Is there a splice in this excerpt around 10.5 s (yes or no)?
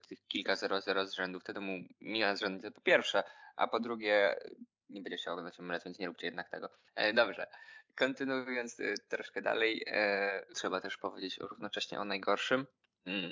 yes